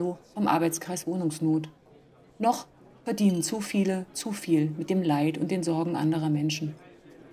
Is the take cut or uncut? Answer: uncut